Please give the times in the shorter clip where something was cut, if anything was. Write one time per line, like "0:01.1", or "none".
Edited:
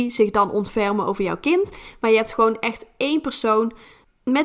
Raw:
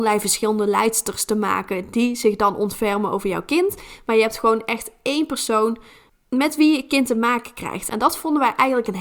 none